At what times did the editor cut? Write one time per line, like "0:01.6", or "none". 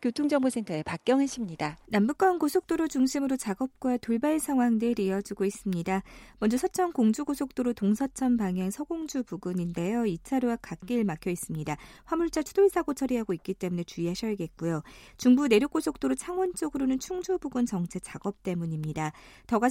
0:01.8